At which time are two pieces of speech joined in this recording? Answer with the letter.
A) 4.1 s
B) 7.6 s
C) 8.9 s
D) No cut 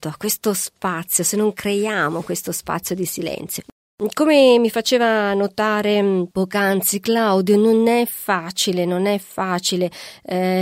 D